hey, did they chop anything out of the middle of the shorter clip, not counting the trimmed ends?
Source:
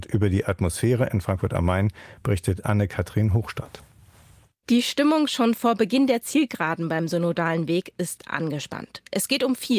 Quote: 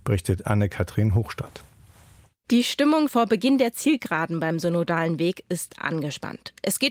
yes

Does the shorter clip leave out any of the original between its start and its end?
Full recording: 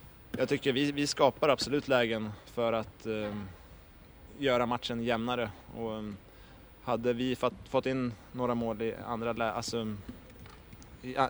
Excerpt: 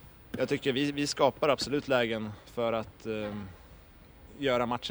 no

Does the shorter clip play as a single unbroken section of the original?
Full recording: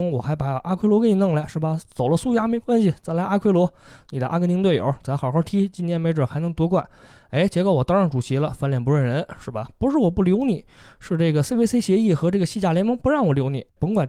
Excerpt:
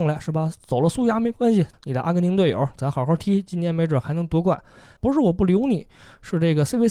no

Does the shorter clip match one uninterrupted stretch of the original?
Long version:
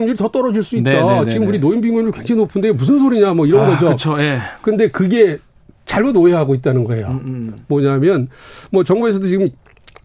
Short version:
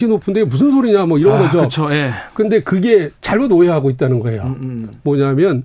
no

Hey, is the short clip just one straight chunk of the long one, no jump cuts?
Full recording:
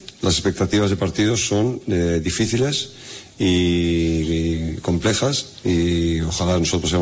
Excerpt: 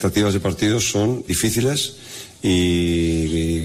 no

